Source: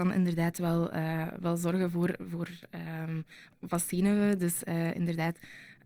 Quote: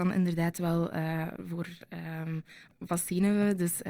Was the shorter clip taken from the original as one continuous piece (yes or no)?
no